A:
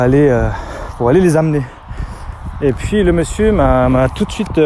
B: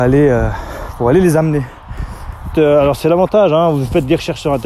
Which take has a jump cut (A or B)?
B